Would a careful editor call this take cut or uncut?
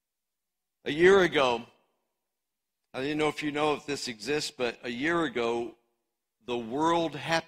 uncut